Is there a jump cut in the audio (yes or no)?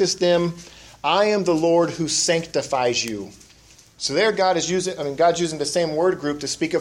no